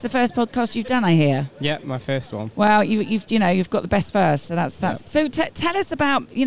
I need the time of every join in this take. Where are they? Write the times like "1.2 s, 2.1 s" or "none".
5.0 s